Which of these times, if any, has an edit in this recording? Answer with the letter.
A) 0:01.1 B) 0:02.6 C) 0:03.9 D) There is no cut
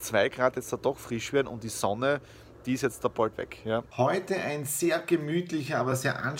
C